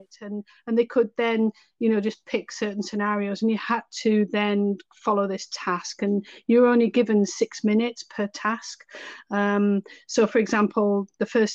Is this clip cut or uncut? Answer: uncut